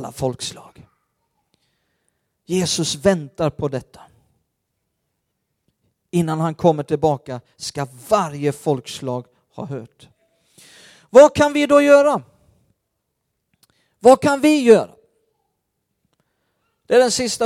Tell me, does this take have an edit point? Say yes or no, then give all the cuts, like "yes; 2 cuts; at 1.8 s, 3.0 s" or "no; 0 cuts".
no; 0 cuts